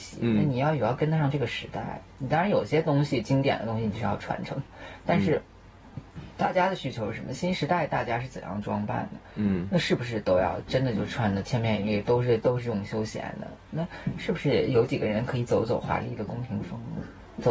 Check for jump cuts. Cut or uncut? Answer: uncut